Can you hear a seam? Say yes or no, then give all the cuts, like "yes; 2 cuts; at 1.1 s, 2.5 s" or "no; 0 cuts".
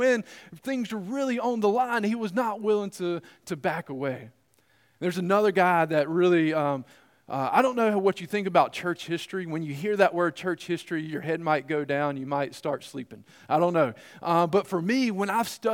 no; 0 cuts